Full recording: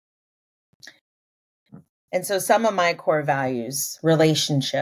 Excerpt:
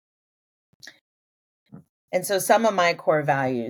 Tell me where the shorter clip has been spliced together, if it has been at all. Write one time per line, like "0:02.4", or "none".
none